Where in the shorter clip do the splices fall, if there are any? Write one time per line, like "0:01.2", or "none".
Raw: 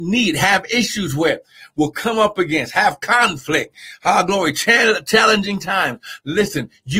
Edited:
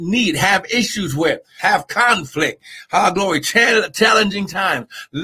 0:01.6